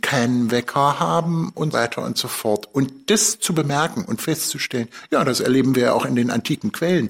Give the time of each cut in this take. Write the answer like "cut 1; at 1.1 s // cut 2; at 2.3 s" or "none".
cut 1; at 1.7 s